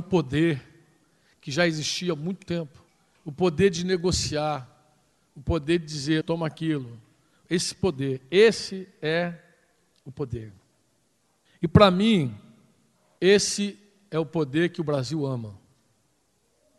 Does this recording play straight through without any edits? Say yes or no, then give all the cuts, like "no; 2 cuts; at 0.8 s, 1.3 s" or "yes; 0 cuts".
no; 1 cut; at 6.2 s